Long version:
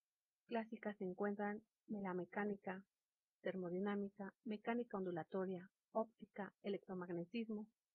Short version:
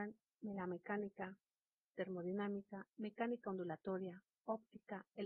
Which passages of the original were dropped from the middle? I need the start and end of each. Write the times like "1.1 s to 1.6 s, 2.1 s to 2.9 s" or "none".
none